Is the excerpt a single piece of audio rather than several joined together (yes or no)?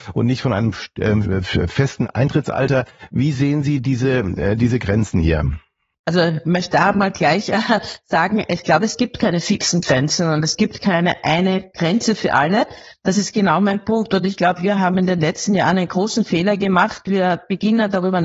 yes